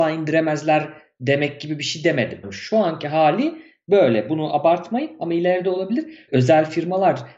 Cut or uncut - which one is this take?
cut